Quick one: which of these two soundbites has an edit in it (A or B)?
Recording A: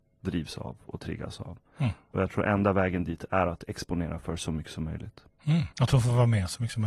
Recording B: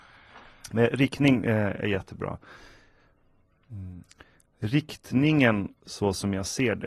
A